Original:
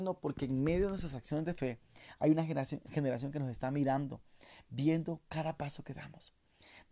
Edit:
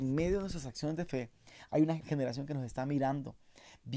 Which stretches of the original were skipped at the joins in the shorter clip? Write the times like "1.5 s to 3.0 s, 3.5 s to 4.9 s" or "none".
2.5 s to 2.8 s

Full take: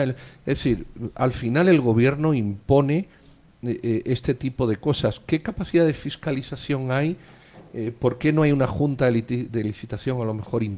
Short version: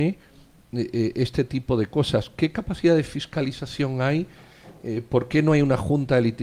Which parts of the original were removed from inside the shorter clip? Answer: none

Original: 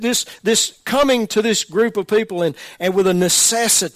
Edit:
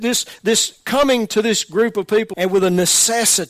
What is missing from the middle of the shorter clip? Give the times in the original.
2.3 s to 2.8 s

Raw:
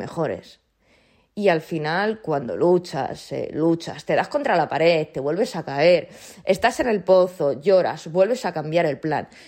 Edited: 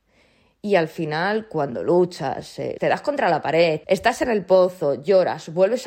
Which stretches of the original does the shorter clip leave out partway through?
3.5 s to 4.0 s, 5.1 s to 6.4 s

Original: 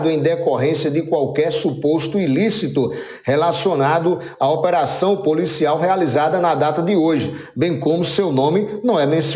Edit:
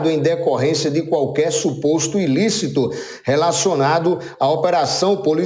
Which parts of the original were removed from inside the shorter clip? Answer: none

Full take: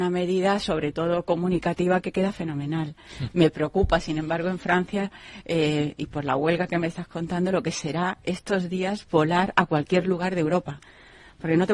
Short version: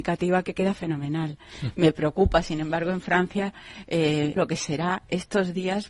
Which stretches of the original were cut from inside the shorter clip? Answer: 5.9 s to 7.5 s

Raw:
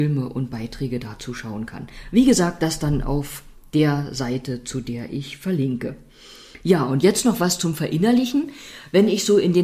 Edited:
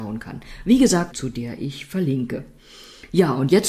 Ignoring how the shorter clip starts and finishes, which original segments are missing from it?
2.6 s to 4.6 s

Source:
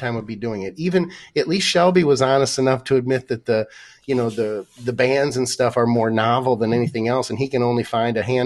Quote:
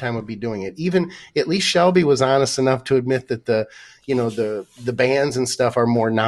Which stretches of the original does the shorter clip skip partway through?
none

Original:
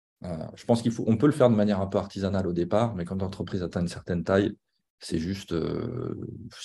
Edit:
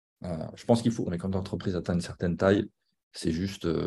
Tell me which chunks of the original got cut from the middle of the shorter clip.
1.1 s to 2.9 s

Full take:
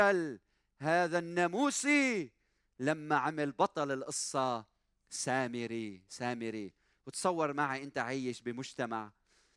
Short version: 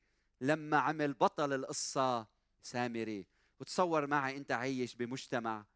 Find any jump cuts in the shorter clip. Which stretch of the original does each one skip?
5.0 s to 6.1 s

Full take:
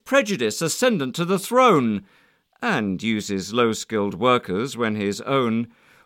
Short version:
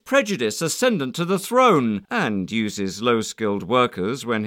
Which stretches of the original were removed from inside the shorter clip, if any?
2.0 s to 2.6 s

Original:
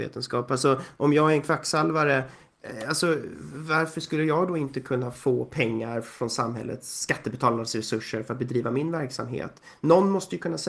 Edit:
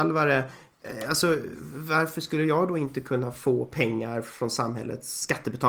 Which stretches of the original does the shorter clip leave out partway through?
none

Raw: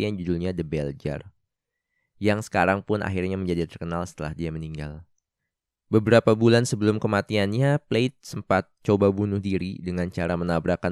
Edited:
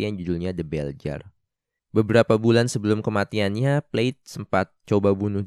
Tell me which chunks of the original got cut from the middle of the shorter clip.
1.8 s to 5.8 s

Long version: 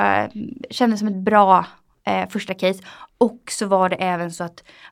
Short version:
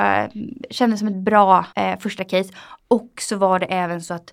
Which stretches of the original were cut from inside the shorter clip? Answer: 1.7 s to 2.0 s

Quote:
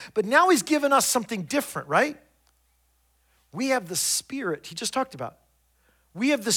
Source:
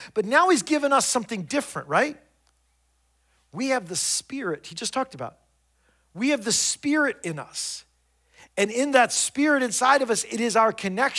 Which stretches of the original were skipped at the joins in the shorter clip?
none

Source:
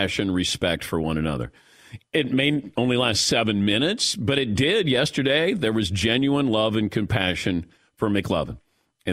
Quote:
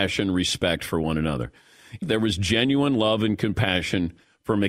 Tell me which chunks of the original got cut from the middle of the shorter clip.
2.0 s to 5.5 s

